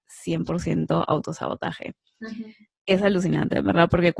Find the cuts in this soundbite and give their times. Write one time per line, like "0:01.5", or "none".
none